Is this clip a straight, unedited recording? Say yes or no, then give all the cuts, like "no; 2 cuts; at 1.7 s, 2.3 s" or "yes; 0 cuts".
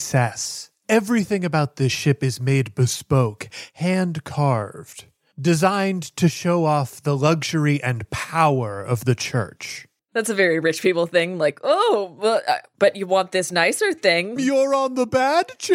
no; 2 cuts; at 10.0 s, 14.4 s